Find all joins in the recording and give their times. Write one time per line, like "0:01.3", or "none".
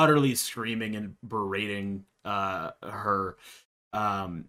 none

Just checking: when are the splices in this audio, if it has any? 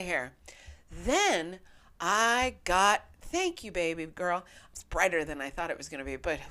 0:04.7

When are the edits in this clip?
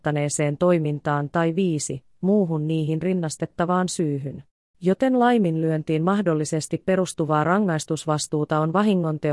0:04.7

